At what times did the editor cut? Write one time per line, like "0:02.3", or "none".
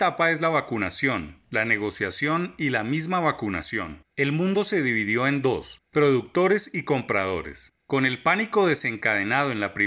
0:04.1
0:07.8